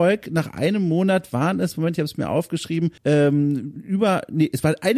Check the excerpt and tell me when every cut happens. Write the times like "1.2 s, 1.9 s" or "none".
3.0 s

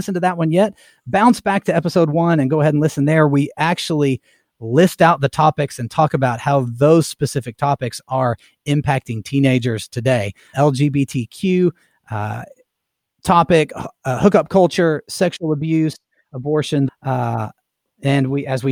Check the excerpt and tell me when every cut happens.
10.5 s, 16.9 s

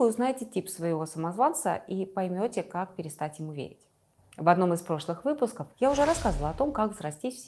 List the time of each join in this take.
4.2 s, 5.7 s

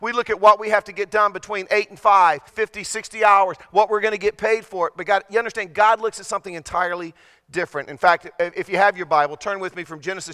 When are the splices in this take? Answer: 2.5 s

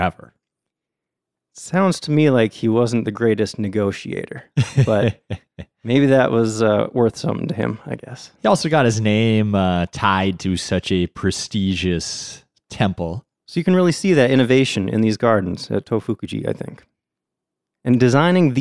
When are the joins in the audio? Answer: 13.4 s

